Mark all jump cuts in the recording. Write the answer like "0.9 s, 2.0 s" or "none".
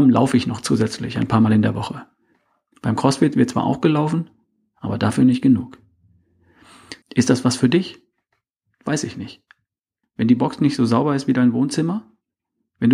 7.0 s, 10.0 s